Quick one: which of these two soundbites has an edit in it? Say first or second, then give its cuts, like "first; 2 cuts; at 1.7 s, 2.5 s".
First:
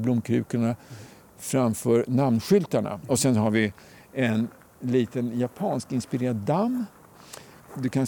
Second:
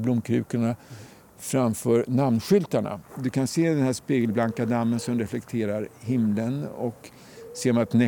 second; 1 cut; at 3.0 s